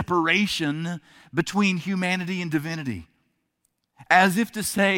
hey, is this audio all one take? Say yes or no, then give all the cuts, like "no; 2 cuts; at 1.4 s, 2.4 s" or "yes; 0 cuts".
yes; 0 cuts